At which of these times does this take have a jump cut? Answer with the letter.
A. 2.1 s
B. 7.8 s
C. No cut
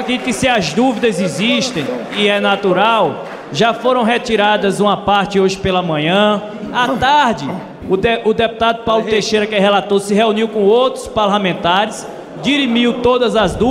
B